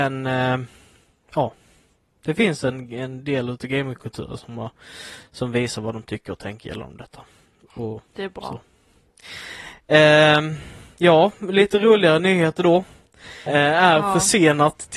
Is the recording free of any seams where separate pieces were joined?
no; 1 cut; at 13.5 s

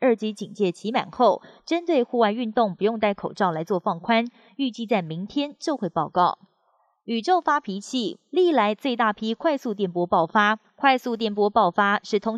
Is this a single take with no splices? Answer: yes; 0 cuts

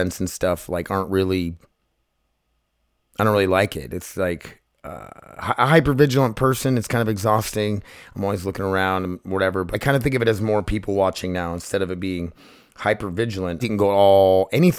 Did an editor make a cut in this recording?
yes; 2 cuts; at 9.7 s, 13.6 s

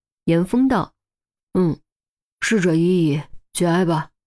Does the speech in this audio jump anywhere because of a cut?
yes; 1 cut; at 1.4 s

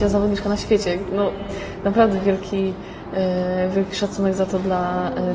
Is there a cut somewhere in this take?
no; 0 cuts

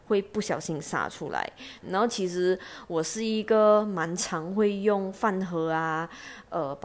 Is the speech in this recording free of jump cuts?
no; 1 cut; at 1.8 s

